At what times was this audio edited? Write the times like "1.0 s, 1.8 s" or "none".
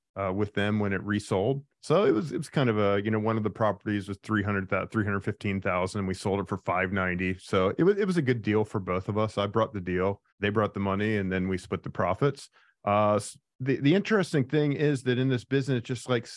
1.7 s, 10.3 s, 12.7 s

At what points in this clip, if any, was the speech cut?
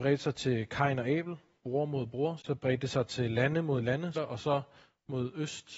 2.4 s, 4.1 s

